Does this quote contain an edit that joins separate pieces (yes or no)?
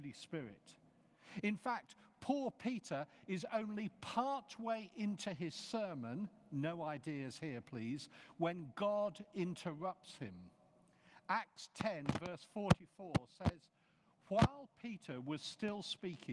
no